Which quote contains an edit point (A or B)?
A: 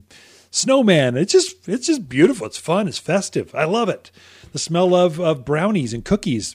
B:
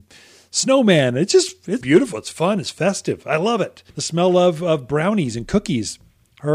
B